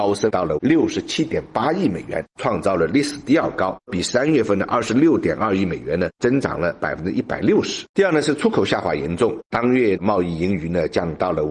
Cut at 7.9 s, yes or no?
yes